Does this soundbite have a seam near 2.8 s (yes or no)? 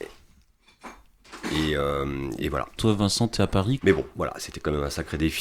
yes